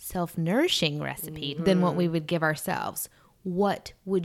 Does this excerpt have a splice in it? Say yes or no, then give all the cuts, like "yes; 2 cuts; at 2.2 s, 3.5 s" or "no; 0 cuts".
yes; 1 cut; at 1.5 s